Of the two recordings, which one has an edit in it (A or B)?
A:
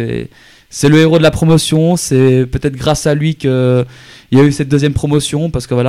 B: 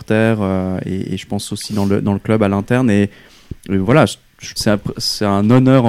B